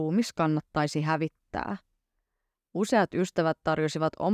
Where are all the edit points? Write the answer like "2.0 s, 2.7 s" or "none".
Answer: 2.5 s

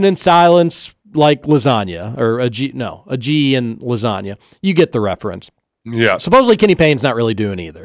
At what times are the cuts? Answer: none

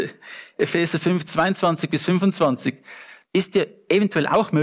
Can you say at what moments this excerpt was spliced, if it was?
3.2 s

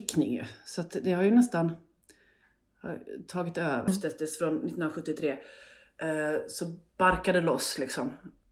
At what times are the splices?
3.9 s

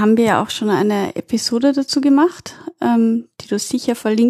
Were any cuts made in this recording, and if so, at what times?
none

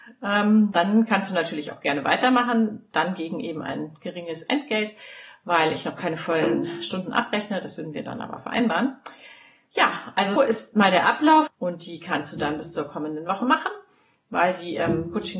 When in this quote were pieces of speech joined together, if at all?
10.4 s, 11.5 s

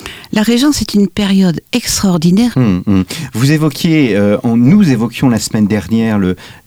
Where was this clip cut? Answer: 2.5 s

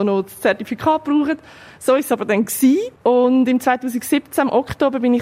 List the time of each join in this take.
none

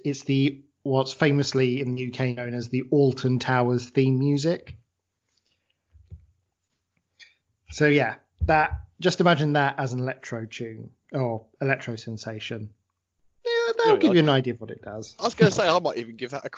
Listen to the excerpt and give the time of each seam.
none

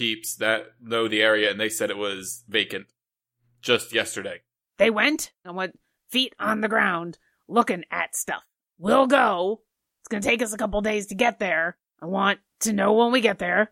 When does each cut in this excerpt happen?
5.4 s

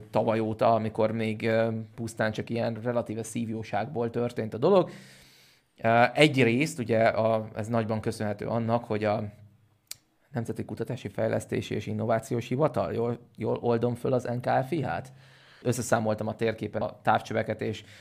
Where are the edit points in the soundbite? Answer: 15.6 s, 16.8 s

